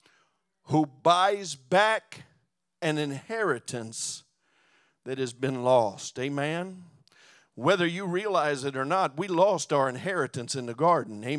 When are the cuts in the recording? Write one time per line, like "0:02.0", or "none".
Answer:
none

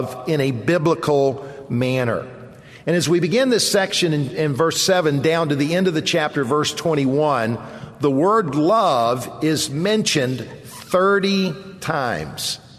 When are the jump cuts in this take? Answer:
none

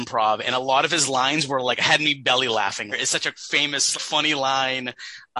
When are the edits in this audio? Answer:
0:02.9
0:03.9

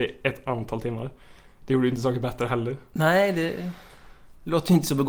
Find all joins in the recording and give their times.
none

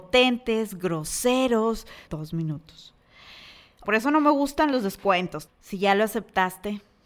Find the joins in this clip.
0:02.1
0:03.8
0:05.5

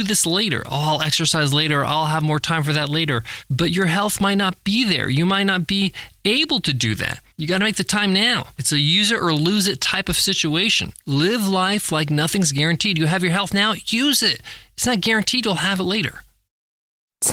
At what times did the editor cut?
none

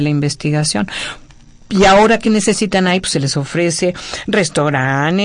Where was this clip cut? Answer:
none

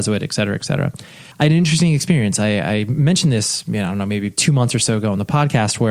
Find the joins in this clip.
0:01.3

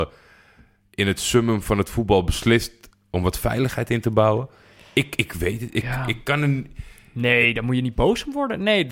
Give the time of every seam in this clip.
none

